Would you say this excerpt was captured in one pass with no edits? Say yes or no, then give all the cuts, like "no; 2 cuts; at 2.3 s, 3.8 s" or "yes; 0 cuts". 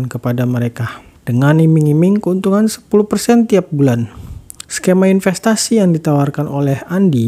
no; 2 cuts; at 1.2 s, 4.6 s